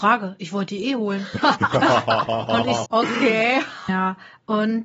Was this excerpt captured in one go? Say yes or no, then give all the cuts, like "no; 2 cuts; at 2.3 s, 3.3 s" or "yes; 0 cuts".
no; 2 cuts; at 2.9 s, 3.9 s